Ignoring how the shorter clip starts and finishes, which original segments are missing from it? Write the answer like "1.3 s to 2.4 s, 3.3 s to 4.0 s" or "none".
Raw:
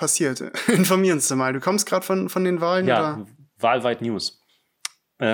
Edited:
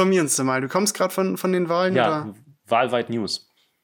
none